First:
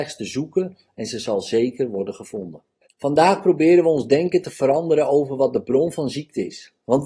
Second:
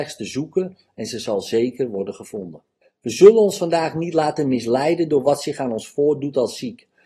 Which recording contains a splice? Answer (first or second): first